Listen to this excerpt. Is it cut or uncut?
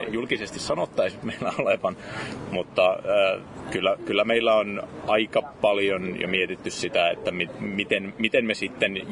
uncut